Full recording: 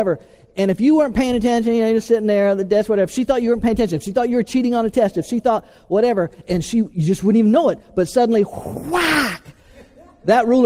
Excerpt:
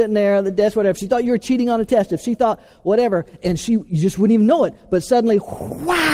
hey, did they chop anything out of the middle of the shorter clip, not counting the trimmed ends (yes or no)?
yes